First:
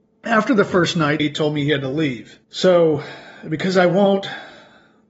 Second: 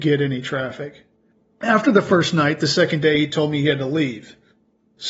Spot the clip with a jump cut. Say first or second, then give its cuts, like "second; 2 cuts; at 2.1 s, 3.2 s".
first; 2 cuts; at 1.2 s, 2.4 s